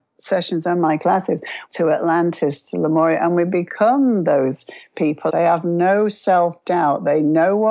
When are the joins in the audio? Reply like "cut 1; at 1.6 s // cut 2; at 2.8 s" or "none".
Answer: cut 1; at 1.7 s // cut 2; at 5.3 s